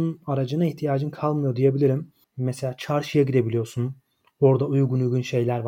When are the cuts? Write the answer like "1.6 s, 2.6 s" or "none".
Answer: 2.2 s